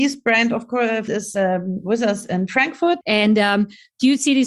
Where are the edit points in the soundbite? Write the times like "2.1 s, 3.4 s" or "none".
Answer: 1.1 s, 3.0 s